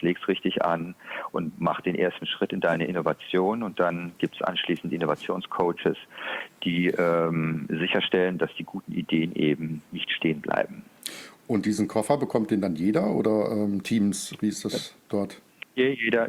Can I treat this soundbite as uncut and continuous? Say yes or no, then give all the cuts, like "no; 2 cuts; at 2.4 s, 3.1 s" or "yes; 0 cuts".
yes; 0 cuts